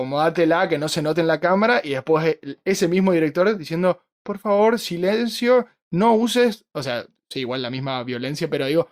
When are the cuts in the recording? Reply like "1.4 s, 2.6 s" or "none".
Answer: none